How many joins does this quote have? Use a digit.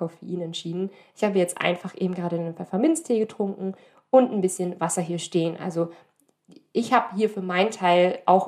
0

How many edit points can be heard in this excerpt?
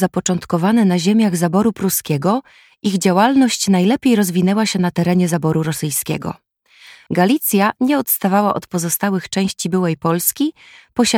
1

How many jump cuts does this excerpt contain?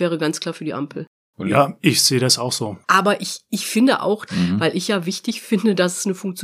2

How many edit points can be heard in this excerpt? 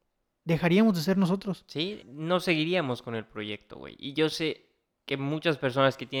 1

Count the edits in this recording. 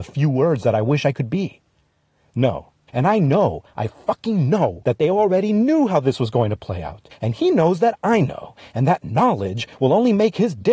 2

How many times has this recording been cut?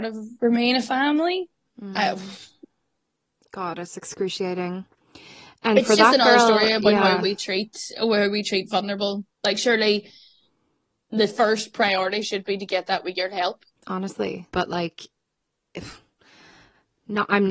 2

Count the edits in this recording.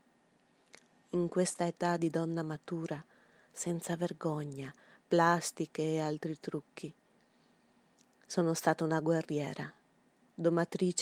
1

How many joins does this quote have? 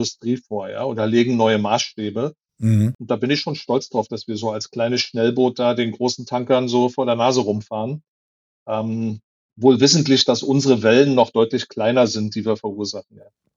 0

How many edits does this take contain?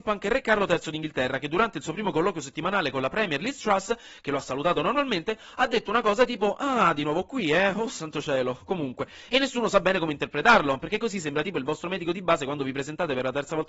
0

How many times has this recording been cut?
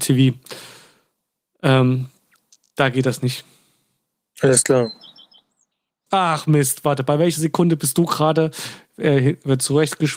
1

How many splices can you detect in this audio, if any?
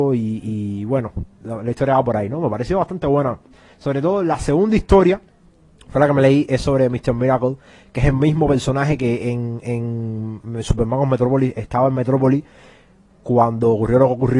0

